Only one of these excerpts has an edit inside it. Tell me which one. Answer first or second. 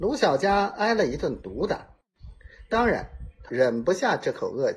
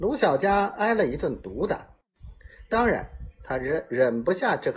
first